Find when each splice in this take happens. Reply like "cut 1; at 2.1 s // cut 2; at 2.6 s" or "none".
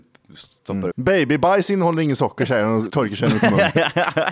cut 1; at 0.9 s